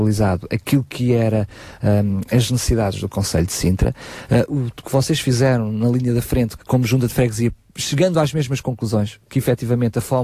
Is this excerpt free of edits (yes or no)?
no